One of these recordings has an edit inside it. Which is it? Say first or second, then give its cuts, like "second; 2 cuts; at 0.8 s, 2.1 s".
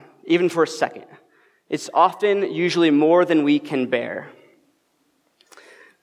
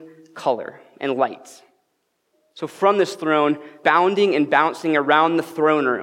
second; 1 cut; at 3.8 s